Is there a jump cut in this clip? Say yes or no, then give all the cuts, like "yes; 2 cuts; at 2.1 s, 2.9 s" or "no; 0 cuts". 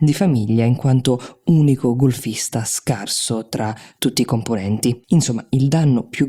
yes; 1 cut; at 5.0 s